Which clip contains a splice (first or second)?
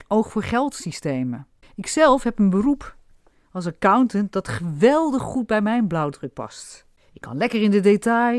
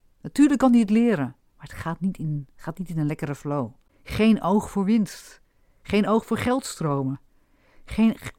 first